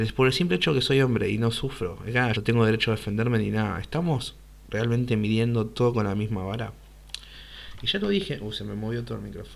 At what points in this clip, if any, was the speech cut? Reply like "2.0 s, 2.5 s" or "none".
2.3 s